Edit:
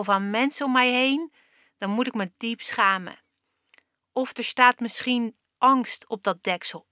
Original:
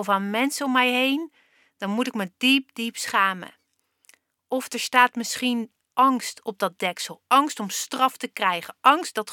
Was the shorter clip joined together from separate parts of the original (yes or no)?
yes